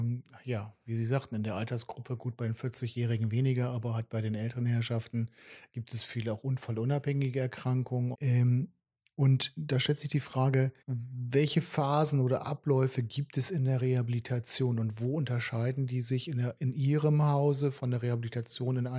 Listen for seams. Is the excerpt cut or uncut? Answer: cut